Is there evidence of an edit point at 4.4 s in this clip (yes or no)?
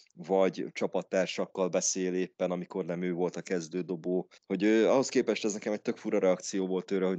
yes